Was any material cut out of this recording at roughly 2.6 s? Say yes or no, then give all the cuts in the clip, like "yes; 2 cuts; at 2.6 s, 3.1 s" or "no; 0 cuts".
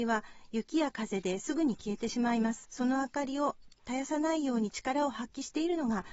yes; 1 cut; at 2.6 s